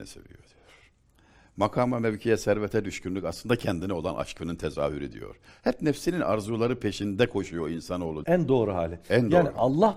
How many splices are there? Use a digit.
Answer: 1